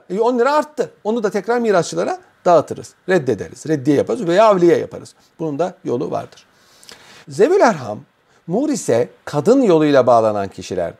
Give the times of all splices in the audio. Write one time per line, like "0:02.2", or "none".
0:07.2
0:09.2